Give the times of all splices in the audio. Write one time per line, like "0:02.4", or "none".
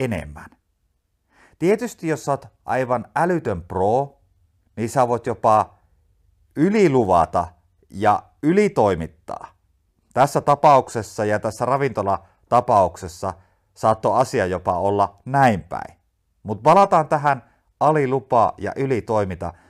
none